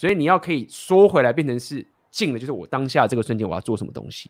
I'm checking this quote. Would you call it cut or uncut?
uncut